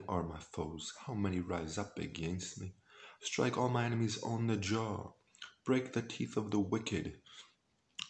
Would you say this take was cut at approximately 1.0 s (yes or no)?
no